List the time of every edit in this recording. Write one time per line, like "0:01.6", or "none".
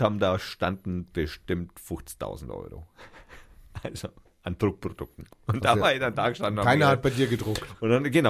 none

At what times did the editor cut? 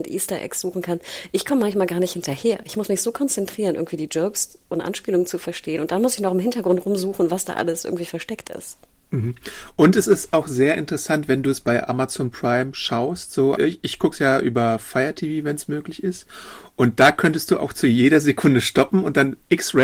0:13.6

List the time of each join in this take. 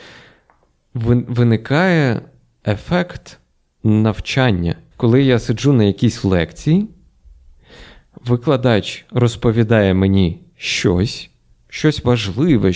0:04.9

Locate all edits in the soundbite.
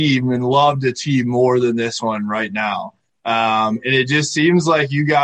none

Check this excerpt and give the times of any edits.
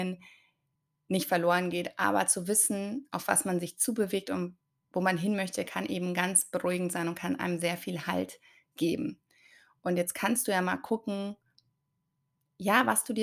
none

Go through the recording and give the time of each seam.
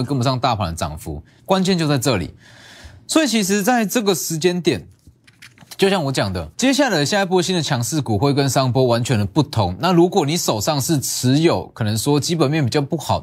0:01.4
0:06.5

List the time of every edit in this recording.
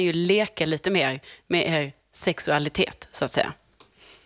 none

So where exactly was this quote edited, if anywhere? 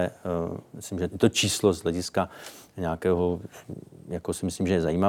0:01.1

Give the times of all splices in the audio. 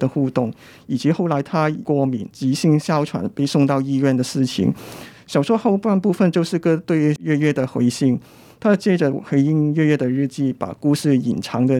0:06.6

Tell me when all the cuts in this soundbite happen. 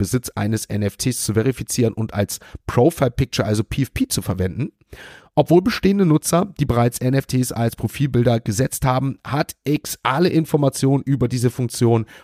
none

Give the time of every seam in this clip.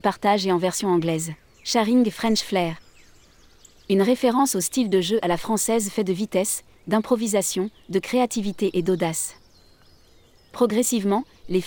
none

